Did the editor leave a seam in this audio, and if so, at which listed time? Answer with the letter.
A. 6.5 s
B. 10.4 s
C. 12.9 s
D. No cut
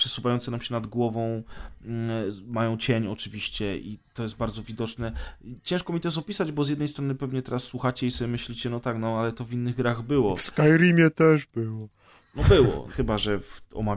C